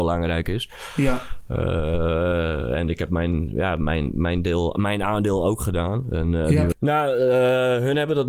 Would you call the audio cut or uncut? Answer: cut